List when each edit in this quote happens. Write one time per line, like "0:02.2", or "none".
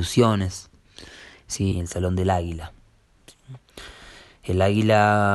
0:01.7